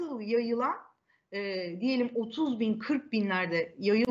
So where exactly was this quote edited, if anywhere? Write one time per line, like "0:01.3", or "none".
none